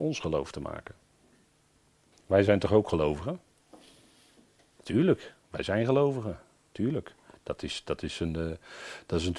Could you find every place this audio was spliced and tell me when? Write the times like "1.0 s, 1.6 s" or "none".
2.1 s